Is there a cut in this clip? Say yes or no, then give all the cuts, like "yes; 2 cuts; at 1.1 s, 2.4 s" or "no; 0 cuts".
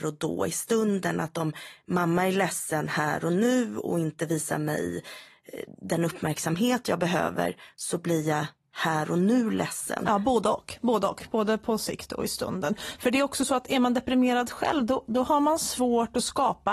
no; 0 cuts